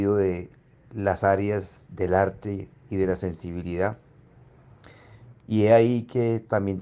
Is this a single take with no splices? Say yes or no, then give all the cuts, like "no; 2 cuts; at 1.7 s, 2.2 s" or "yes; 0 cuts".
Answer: no; 1 cut; at 5.3 s